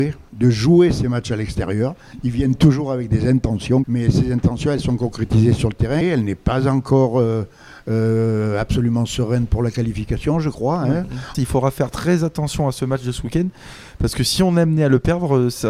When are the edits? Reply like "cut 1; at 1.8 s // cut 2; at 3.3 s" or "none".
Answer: cut 1; at 3.8 s // cut 2; at 6.0 s // cut 3; at 11.3 s